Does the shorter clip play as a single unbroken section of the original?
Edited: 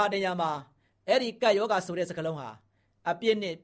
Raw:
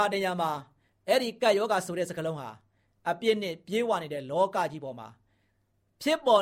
yes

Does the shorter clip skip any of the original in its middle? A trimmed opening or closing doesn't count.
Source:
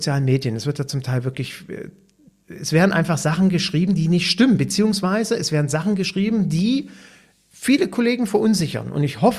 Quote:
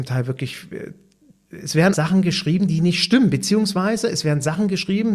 yes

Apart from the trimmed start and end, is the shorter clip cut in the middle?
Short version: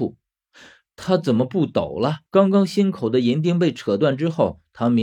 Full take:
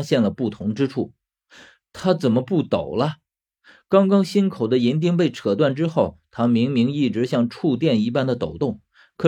yes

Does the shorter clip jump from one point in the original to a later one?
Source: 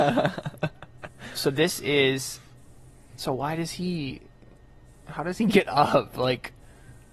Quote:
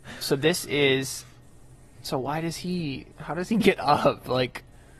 yes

